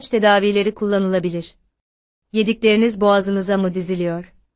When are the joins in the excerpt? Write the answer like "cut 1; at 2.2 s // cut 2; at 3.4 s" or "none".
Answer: cut 1; at 2.1 s